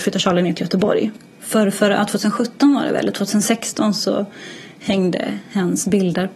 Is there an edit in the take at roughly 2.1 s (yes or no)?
no